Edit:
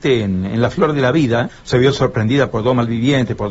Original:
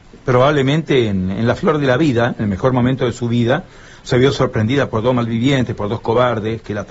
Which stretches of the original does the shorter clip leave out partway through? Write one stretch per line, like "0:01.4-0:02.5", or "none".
0:02.3-0:03.9